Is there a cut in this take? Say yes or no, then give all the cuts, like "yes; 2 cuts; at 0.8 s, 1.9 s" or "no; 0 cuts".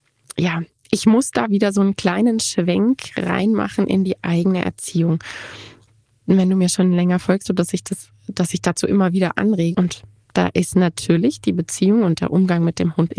yes; 2 cuts; at 7.4 s, 9.7 s